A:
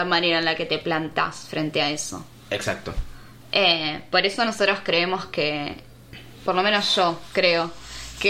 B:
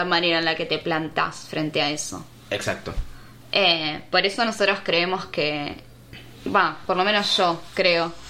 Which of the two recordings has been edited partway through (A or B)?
A